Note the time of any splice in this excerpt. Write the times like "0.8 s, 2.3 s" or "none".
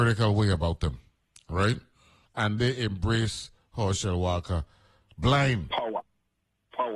2.2 s